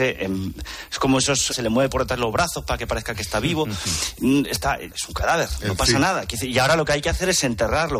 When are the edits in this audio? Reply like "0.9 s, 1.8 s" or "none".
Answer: 1.5 s, 4.9 s